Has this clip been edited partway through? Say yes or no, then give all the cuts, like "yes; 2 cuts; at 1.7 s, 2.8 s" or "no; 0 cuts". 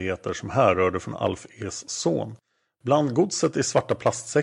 no; 0 cuts